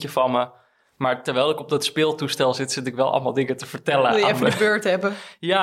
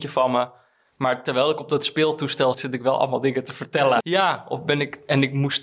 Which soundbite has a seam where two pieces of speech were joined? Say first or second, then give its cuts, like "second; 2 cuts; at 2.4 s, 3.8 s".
second; 2 cuts; at 2.5 s, 4.0 s